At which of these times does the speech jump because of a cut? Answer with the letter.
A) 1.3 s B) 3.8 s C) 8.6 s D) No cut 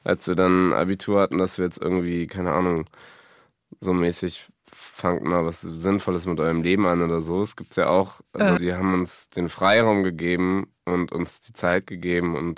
C